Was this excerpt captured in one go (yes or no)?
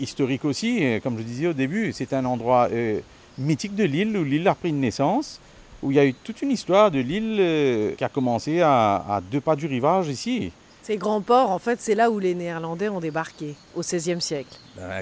yes